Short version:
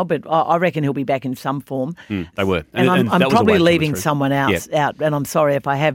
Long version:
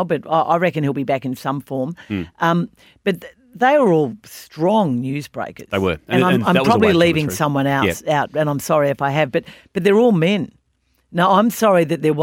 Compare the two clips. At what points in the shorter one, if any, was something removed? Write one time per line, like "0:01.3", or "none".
0:02.3